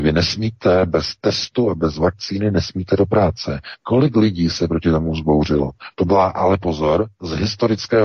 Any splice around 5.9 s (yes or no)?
yes